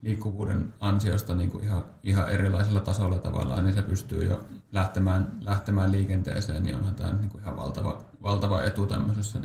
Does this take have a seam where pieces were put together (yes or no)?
yes